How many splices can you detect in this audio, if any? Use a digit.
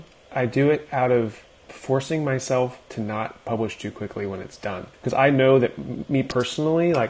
2